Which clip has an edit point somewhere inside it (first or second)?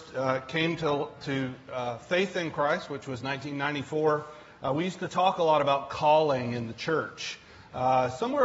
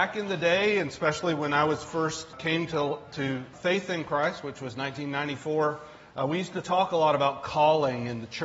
second